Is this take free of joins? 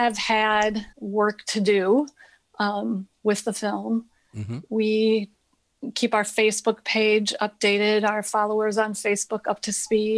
yes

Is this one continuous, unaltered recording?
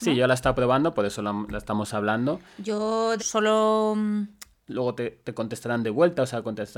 no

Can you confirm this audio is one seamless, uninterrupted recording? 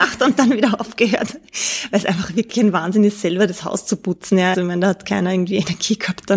no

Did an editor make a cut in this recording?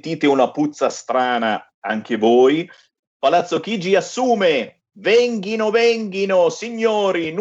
no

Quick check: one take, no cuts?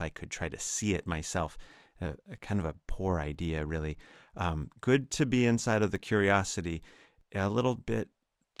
yes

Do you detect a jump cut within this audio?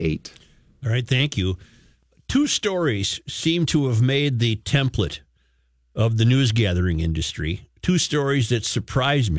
no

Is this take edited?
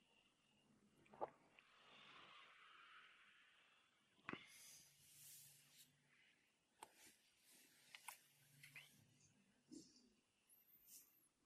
no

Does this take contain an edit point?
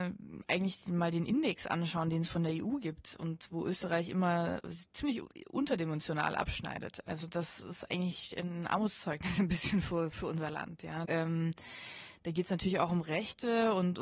yes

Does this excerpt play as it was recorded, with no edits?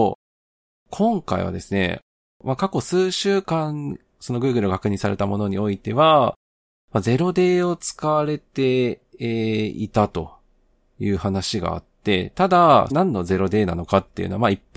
no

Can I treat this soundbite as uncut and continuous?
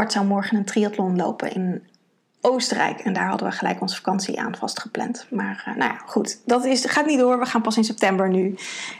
yes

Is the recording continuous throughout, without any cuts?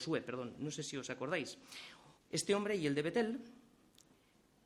no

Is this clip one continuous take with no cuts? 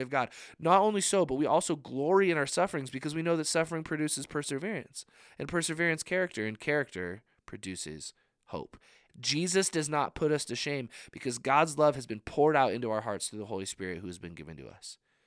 no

